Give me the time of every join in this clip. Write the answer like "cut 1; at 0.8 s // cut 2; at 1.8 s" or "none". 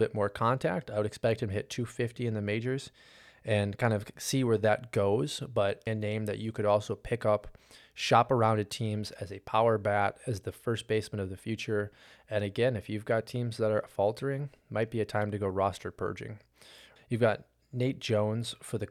cut 1; at 5.9 s // cut 2; at 17.0 s